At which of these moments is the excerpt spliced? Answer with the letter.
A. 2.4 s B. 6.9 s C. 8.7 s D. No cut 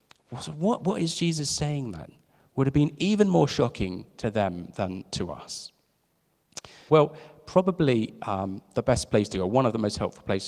B